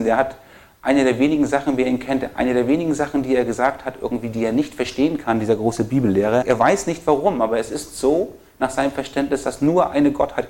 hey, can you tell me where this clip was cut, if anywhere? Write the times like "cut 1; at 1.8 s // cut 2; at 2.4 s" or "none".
cut 1; at 6.4 s